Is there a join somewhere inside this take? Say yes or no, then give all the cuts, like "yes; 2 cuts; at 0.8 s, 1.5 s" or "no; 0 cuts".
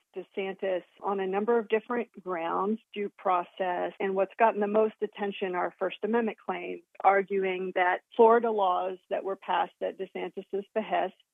yes; 2 cuts; at 2.8 s, 4.0 s